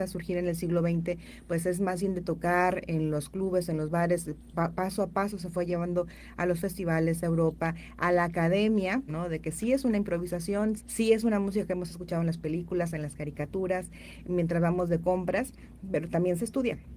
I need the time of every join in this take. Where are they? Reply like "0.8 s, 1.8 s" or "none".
9.1 s, 10.8 s